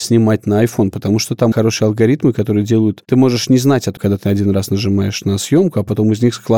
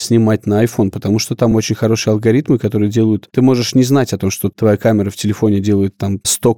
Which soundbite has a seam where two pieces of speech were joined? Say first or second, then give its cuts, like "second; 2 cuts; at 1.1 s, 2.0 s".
first; 2 cuts; at 1.5 s, 4.0 s